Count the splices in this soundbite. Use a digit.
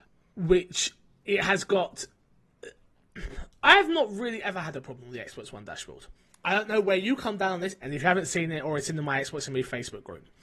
2